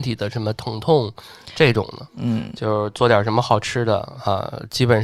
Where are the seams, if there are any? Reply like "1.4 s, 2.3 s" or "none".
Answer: 2.1 s

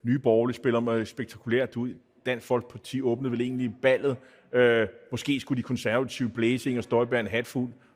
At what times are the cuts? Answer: none

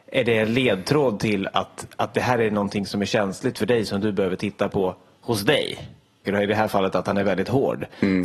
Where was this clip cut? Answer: 6.3 s

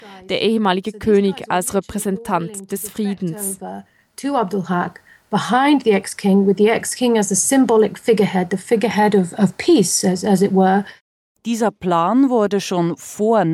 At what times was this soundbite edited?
none

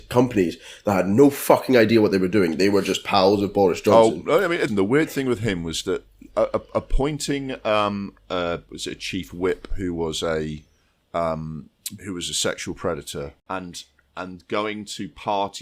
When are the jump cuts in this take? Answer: 4.7 s

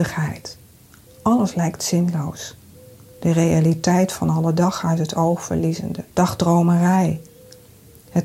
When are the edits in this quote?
6.1 s

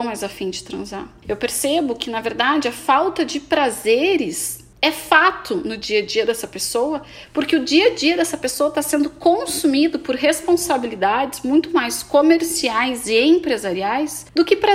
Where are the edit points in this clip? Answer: 1.2 s

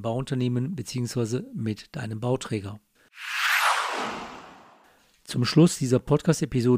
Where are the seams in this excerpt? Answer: none

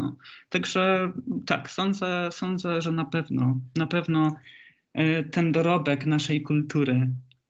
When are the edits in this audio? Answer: none

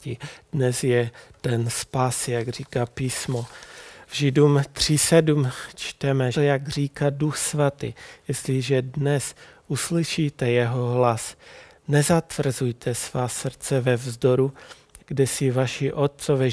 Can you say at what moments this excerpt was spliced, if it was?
6.3 s, 15.0 s

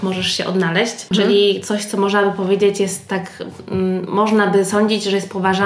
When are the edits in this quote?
1.1 s

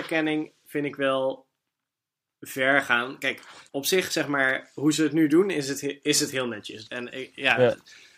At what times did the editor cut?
6.8 s

